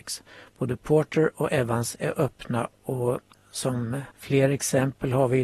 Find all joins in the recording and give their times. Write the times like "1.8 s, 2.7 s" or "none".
4.1 s